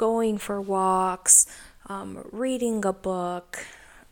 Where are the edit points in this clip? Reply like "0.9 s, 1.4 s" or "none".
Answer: none